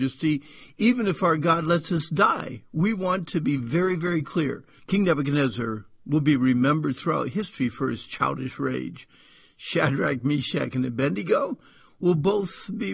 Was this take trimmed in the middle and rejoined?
yes; 1 cut; at 4.8 s

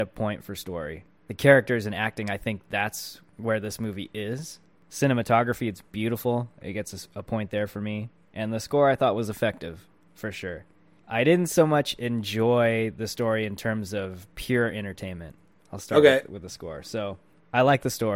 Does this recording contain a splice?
yes; 2 cuts; at 4.8 s, 15.6 s

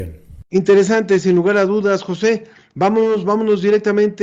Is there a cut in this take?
no; 0 cuts

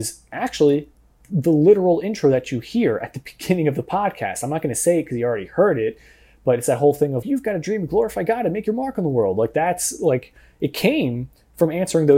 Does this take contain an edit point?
yes; 1 cut; at 7.2 s

